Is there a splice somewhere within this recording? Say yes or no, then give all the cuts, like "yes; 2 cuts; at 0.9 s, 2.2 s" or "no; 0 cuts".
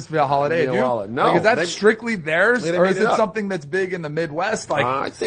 no; 0 cuts